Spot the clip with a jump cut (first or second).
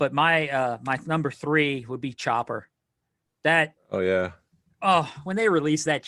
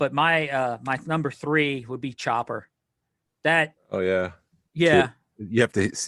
second